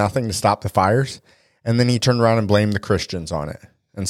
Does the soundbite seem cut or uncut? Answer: uncut